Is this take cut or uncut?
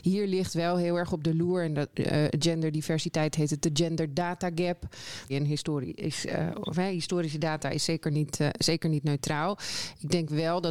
cut